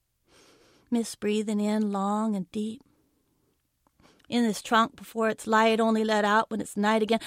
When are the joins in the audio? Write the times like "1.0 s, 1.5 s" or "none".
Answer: none